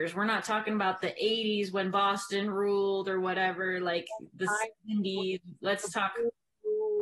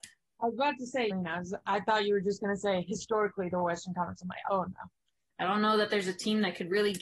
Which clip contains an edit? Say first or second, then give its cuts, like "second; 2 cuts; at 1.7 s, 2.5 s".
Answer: second; 2 cuts; at 1.1 s, 5.3 s